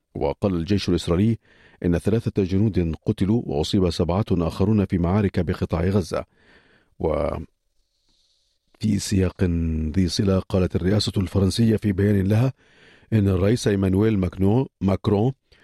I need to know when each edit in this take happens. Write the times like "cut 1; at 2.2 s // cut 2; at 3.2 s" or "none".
none